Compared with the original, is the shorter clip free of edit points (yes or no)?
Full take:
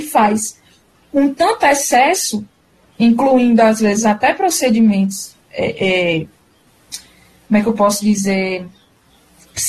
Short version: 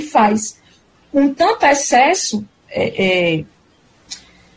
no